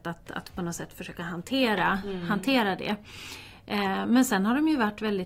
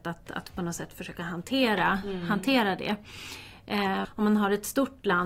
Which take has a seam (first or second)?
second